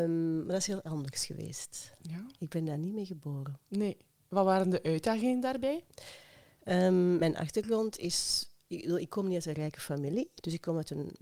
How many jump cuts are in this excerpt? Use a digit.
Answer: 0